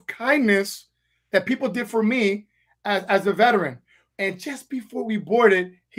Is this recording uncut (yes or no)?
no